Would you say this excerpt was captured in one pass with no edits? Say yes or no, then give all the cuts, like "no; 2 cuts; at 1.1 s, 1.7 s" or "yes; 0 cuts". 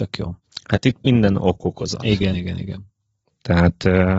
no; 1 cut; at 2.3 s